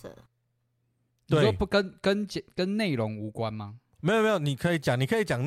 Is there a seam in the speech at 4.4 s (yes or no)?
no